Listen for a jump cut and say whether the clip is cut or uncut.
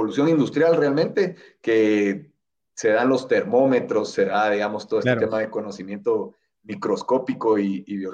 uncut